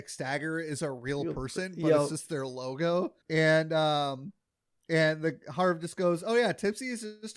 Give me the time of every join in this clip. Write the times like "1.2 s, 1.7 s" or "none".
3.2 s